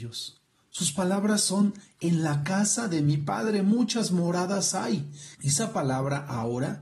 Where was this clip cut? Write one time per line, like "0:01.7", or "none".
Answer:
0:05.3